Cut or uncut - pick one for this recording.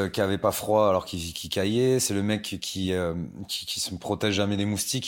uncut